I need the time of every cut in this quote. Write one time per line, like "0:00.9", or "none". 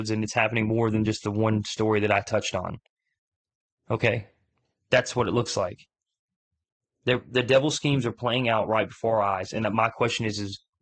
none